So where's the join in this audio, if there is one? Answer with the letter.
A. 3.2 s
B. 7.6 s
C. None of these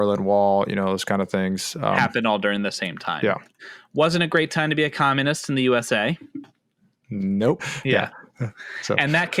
B